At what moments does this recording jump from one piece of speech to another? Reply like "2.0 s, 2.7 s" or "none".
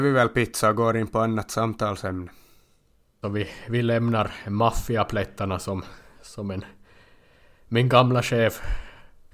3.2 s